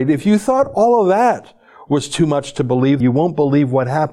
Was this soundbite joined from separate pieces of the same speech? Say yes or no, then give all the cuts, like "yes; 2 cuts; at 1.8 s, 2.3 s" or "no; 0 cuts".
yes; 1 cut; at 3.0 s